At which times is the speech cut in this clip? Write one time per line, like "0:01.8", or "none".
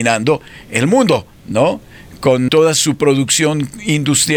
0:02.5